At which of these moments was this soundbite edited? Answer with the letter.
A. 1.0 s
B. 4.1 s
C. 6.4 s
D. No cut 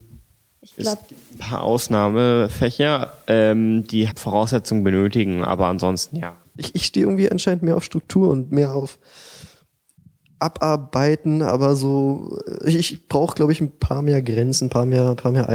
B